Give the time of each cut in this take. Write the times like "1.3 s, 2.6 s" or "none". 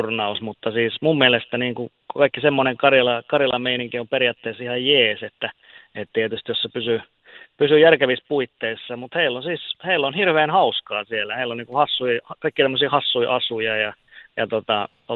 none